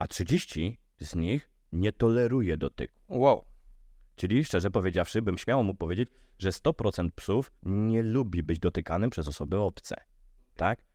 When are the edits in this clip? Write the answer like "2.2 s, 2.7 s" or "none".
7.6 s